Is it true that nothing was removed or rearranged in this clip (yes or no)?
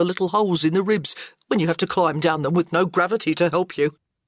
yes